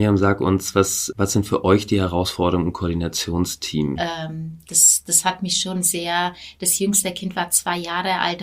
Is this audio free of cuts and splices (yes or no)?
no